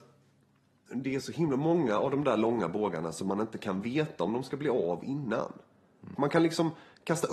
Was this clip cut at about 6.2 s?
yes; 1 cut; at 6.2 s

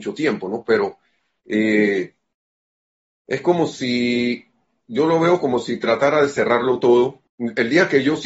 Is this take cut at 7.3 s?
yes; 1 cut; at 7.3 s

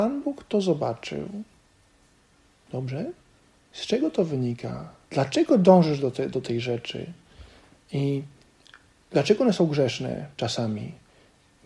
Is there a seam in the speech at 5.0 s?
yes; 2 cuts; at 5.0 s, 7.8 s

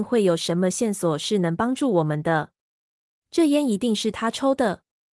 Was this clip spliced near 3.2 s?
yes; 1 cut; at 3.2 s

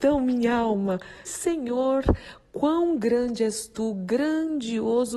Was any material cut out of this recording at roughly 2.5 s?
no; 1 cut; at 1.3 s

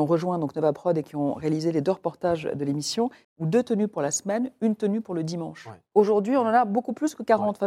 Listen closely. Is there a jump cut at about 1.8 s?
no; 2 cuts; at 3.2 s, 5.9 s

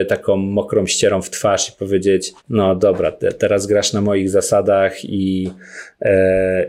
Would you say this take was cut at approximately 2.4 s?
yes; 1 cut; at 2.4 s

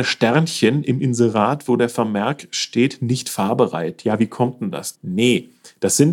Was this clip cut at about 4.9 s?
yes; 1 cut; at 4.9 s

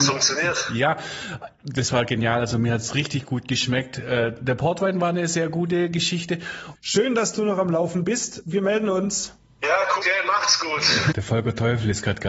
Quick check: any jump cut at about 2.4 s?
no; 3 cuts; at 6.8 s, 10.0 s, 11.1 s

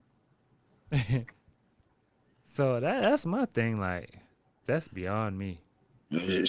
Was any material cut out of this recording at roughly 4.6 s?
yes; 1 cut; at 4.6 s

